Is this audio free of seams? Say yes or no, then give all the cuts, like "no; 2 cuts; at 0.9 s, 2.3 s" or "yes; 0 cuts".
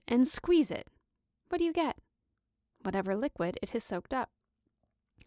yes; 0 cuts